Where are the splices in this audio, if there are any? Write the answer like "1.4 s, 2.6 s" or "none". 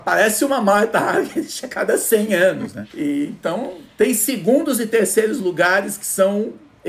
2.9 s